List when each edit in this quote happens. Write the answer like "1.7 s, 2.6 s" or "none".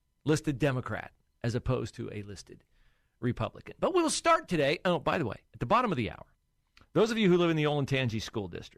none